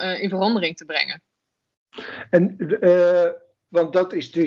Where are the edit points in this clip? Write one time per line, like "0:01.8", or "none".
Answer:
none